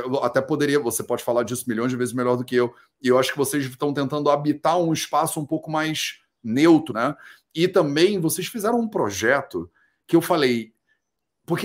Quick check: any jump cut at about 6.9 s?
yes; 1 cut; at 6.9 s

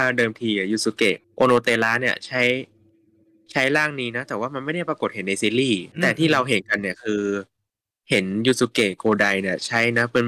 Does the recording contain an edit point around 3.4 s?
no; 2 cuts; at 1.2 s, 5.9 s

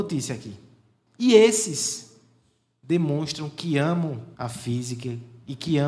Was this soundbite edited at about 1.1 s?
yes; 2 cuts; at 1.1 s, 4.3 s

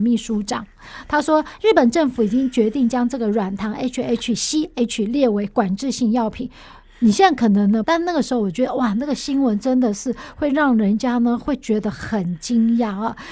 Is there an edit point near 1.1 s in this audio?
no; 1 cut; at 7.8 s

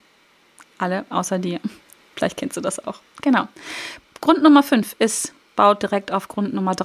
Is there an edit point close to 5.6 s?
yes; 1 cut; at 5.6 s

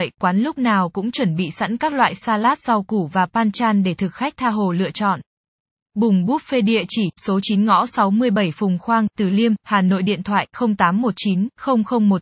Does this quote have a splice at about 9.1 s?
yes; 1 cut; at 9.1 s

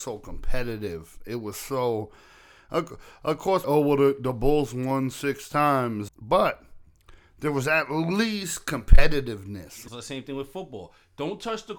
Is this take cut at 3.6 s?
yes; 3 cuts; at 3.6 s, 6.1 s, 9.9 s

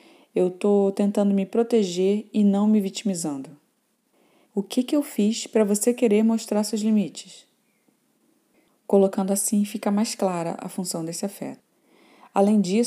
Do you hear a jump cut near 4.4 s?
yes; 1 cut; at 4.4 s

